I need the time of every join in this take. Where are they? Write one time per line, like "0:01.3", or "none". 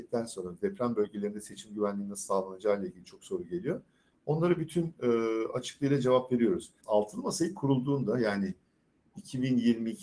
0:06.8